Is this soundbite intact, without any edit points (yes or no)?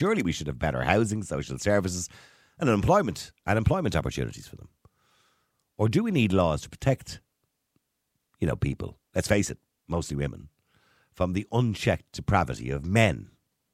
yes